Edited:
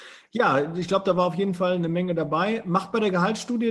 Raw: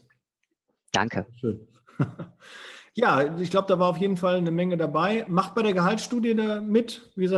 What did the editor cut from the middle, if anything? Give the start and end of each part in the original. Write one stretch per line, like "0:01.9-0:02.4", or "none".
none